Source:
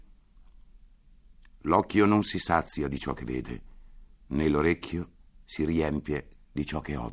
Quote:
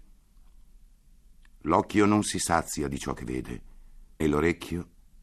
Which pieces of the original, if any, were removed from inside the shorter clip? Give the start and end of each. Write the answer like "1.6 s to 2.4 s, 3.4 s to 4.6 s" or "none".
4.2 s to 4.4 s